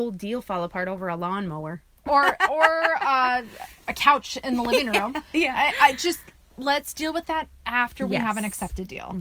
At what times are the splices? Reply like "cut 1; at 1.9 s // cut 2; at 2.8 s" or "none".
none